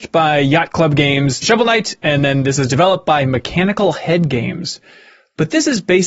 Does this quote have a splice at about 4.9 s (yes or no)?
no